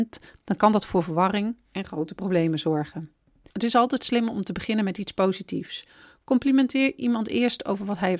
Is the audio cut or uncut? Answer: uncut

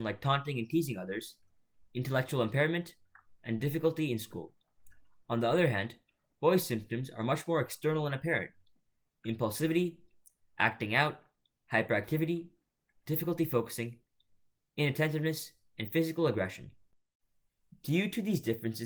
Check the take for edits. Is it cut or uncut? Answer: uncut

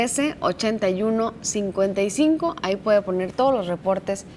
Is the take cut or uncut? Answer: uncut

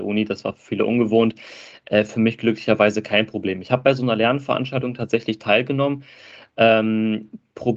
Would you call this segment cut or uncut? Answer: uncut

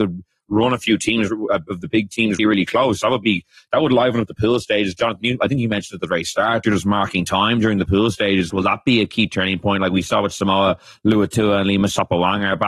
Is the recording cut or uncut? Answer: cut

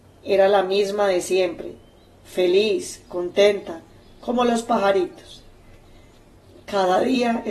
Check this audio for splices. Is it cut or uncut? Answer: uncut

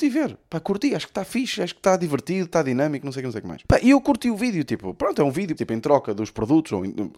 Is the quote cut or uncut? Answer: cut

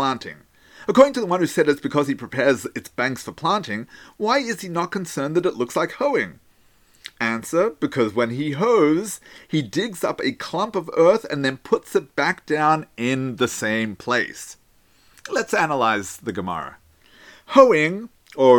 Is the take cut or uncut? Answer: uncut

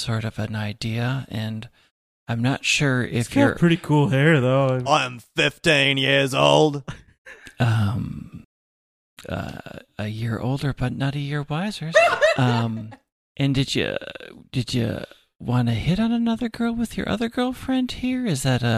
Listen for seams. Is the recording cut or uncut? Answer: cut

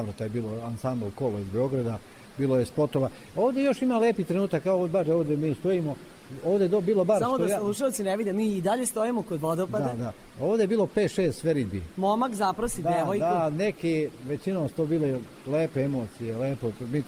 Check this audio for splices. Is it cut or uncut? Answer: cut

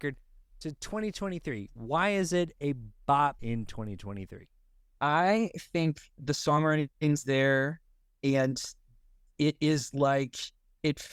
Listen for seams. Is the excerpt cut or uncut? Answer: cut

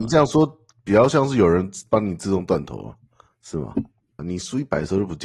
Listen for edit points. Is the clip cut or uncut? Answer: cut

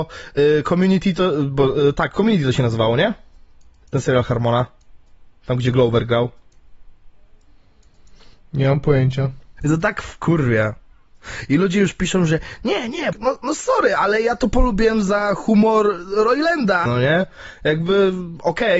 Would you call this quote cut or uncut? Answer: cut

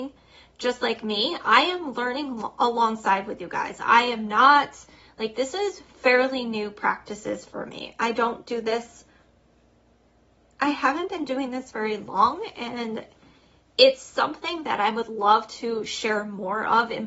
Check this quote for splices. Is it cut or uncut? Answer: uncut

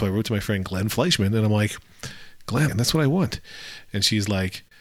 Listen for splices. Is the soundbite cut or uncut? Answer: cut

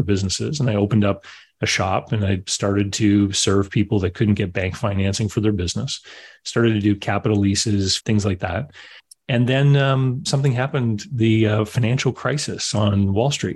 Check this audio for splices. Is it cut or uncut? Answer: cut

